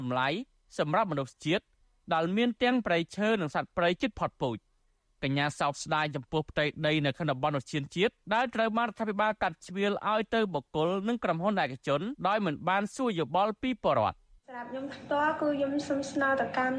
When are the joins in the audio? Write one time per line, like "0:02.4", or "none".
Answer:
0:08.2
0:12.2